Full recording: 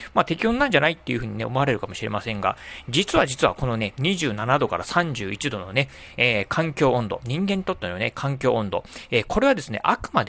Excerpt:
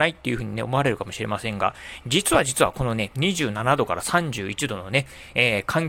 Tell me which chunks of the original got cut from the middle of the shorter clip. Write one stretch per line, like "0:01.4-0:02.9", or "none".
none